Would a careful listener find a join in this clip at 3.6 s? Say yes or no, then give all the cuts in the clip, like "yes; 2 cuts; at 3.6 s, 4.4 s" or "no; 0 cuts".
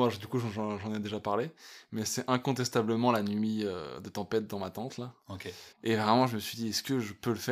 no; 1 cut; at 5.7 s